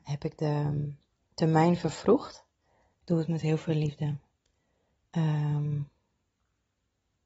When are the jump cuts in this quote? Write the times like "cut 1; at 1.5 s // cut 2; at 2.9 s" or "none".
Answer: cut 1; at 2.9 s